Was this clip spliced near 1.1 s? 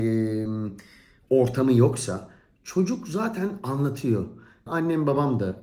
no; 1 cut; at 4.7 s

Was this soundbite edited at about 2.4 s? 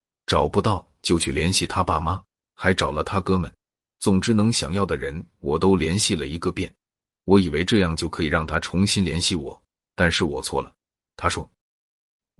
no; 0 cuts

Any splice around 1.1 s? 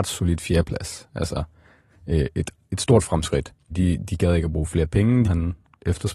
no; 2 cuts; at 3.7 s, 5.2 s

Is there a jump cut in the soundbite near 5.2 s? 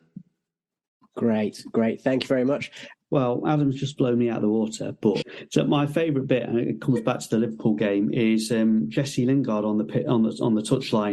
yes; 2 cuts; at 2.9 s, 5.2 s

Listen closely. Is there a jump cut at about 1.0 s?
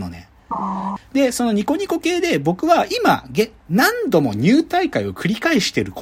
yes; 2 cuts; at 1.0 s, 3.6 s

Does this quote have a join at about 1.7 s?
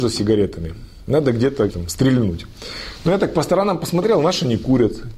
yes; 1 cut; at 1.7 s

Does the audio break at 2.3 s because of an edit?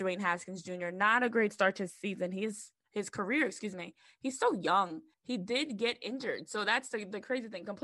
no; 1 cut; at 5.1 s

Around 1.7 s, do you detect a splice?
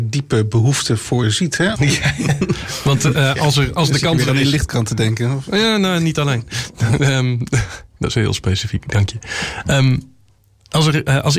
yes; 1 cut; at 1.7 s

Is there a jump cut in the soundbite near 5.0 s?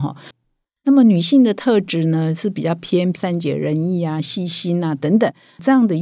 no; 1 cut; at 3.1 s

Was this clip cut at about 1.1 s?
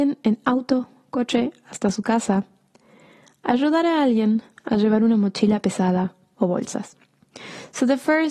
no; 0 cuts

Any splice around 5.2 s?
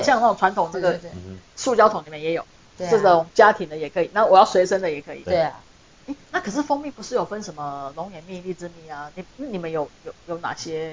no; 0 cuts

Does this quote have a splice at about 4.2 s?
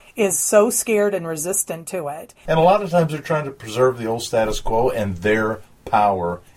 no; 1 cut; at 2.5 s

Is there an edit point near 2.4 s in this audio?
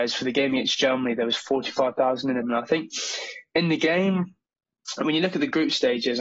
yes; 1 cut; at 2.4 s

